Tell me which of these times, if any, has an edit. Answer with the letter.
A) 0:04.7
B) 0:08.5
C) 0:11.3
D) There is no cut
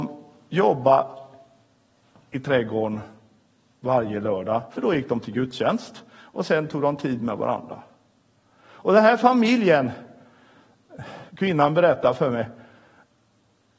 A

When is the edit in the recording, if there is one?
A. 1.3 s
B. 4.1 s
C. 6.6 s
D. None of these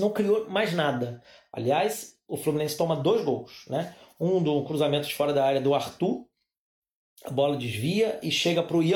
D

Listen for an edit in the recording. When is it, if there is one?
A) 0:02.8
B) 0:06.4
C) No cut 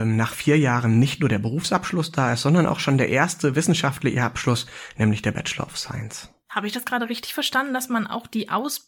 B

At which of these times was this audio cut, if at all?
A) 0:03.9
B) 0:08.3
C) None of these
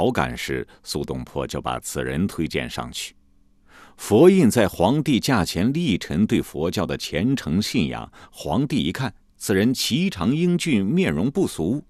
C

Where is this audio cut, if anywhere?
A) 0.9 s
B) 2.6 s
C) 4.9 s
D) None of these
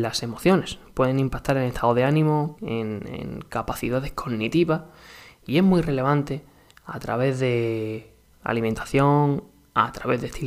B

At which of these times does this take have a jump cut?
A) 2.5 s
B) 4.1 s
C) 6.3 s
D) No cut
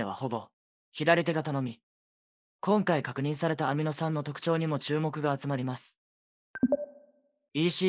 D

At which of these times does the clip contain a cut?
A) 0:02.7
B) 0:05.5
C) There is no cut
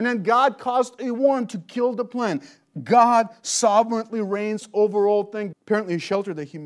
B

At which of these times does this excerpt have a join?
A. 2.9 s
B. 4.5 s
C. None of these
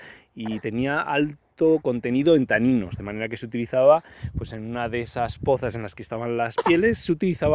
C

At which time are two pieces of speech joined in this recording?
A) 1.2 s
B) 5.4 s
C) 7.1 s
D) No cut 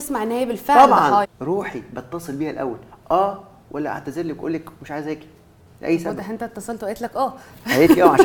A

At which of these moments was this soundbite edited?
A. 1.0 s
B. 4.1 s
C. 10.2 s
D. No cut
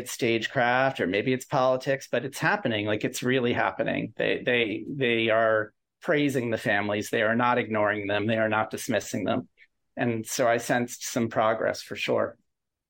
D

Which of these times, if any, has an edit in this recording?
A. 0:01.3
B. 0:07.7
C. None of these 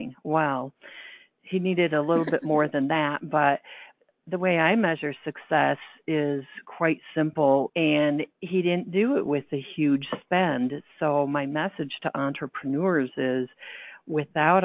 B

